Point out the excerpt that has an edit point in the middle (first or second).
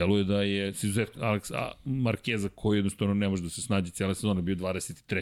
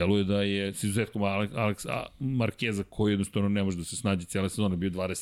first